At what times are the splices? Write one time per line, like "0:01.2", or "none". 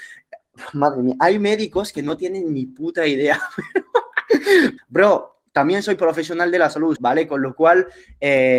0:04.8
0:07.0